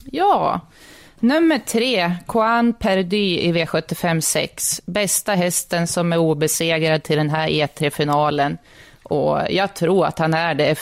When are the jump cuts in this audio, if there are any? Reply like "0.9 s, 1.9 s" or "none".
none